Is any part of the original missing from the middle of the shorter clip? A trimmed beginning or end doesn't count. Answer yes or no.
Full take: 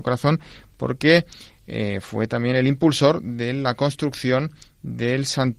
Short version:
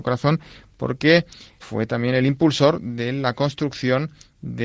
yes